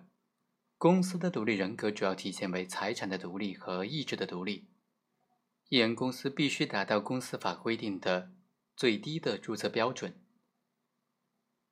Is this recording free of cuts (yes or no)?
yes